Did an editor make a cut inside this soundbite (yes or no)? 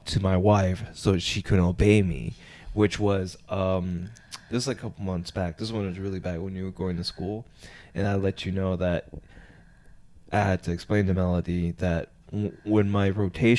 no